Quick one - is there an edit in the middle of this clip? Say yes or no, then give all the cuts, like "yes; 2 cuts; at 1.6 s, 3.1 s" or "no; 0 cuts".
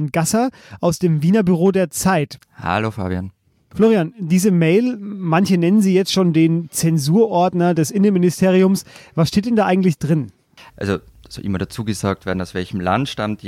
yes; 2 cuts; at 2.4 s, 10.7 s